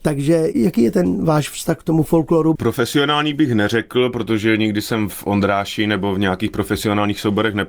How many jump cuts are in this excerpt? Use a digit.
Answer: 1